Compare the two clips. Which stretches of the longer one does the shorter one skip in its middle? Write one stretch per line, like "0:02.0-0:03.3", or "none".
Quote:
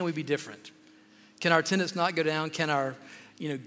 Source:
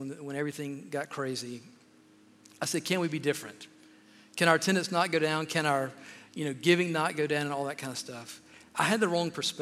none